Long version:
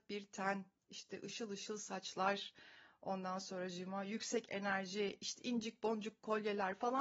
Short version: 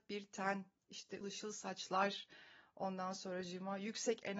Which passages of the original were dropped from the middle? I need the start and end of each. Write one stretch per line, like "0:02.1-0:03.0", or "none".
0:01.2-0:01.5